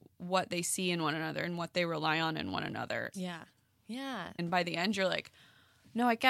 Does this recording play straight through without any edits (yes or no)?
no